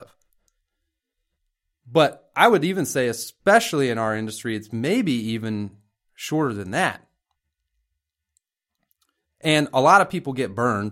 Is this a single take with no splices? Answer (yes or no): yes